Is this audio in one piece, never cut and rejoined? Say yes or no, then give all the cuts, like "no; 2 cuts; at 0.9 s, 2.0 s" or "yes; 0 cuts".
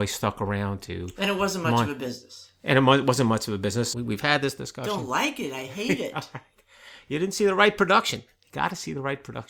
no; 1 cut; at 3.9 s